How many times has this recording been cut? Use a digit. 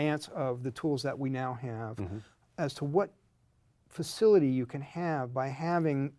0